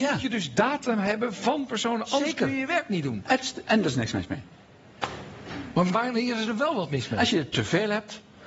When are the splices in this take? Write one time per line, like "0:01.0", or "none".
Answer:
0:05.9